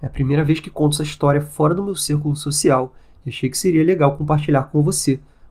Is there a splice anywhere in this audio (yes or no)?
no